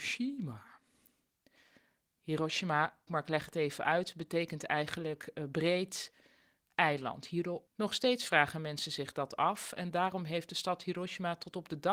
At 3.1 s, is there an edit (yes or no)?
yes